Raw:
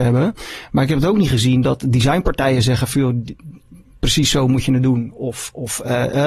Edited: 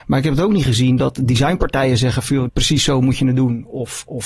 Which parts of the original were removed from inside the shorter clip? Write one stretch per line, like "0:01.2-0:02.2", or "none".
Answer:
0:03.1-0:03.9